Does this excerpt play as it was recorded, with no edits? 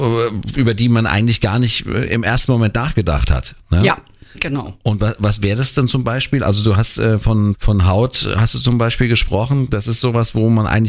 no; 1 cut; at 7.5 s

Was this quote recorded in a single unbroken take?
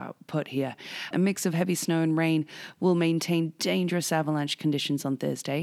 no; 1 cut; at 1.1 s

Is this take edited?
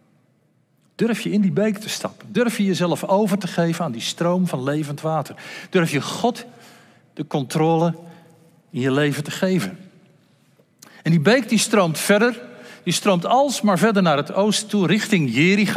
no; 0 cuts

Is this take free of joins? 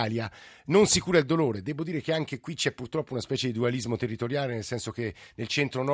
yes; 0 cuts

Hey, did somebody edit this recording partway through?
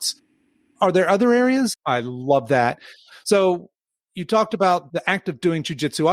yes; 1 cut; at 1.7 s

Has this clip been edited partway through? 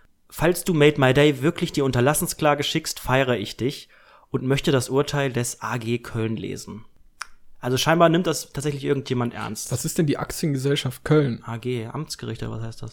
no; 0 cuts

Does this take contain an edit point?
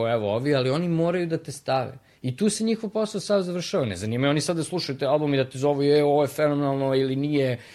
no; 0 cuts

